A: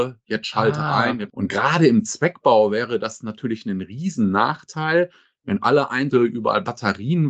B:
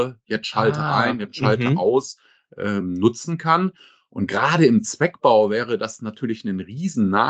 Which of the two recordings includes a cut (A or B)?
A